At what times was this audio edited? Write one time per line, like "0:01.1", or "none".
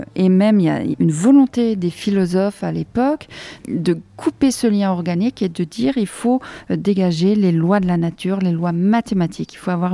0:00.9
0:03.6